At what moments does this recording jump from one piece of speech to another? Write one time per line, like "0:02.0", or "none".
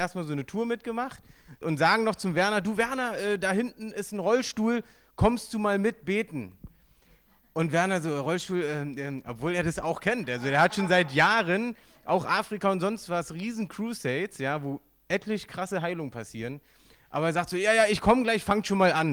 0:01.6